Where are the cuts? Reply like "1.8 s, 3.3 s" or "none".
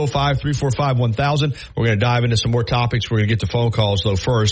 1.7 s